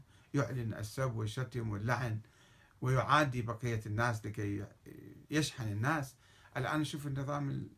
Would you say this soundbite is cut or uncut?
cut